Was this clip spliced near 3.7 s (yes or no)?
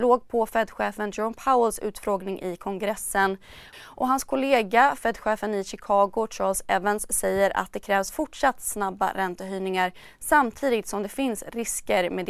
yes